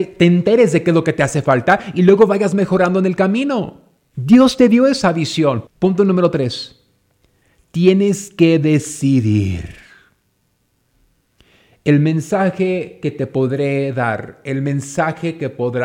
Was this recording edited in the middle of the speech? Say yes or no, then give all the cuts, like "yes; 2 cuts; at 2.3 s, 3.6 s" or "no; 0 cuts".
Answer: yes; 1 cut; at 5.7 s